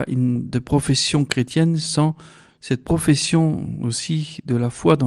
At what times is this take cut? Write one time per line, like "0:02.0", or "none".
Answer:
none